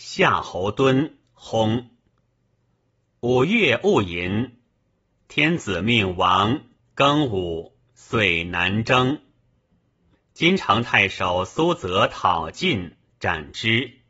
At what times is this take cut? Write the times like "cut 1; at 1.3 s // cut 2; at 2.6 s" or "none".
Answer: cut 1; at 6.8 s // cut 2; at 10.1 s